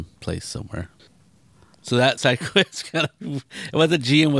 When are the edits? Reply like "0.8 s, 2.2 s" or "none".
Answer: none

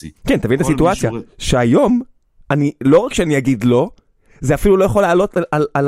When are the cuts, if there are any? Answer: none

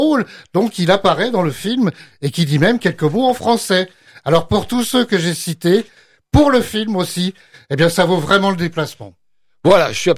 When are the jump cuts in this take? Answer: none

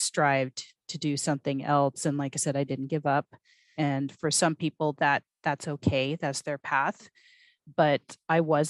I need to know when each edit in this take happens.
3.8 s

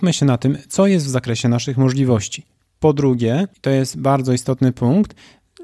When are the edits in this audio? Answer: none

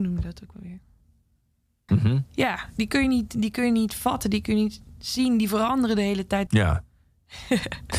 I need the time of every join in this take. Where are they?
1.9 s, 6.5 s

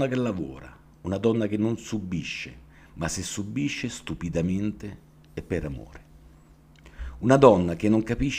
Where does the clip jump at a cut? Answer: none

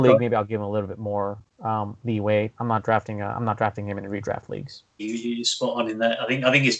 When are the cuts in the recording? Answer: 2.5 s, 5.0 s

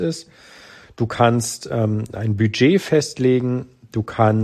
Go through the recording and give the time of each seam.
none

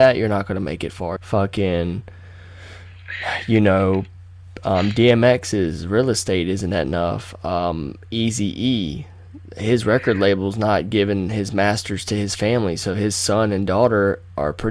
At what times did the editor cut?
1.2 s

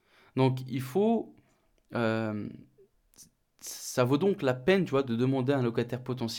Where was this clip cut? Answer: none

